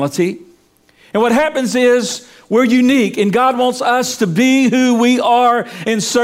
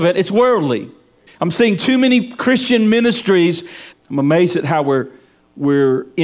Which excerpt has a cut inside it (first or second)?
second